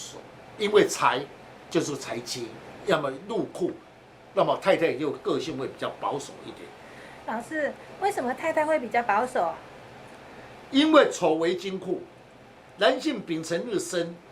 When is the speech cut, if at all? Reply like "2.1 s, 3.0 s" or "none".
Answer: none